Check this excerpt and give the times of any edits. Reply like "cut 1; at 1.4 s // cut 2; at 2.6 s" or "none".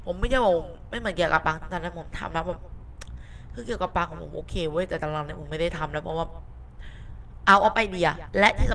none